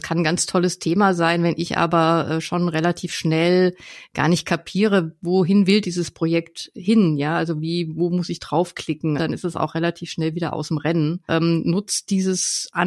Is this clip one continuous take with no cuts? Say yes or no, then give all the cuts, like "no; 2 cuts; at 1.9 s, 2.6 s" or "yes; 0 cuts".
no; 2 cuts; at 9.2 s, 11.3 s